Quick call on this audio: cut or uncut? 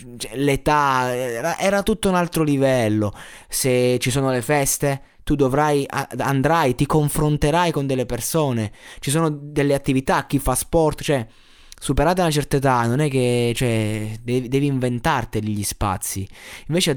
cut